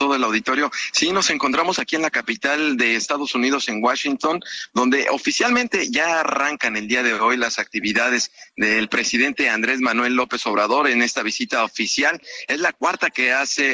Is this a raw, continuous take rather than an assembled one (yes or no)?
yes